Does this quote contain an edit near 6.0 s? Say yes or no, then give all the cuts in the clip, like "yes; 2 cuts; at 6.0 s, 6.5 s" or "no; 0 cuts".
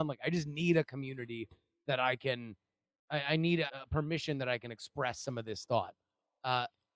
no; 1 cut; at 3.7 s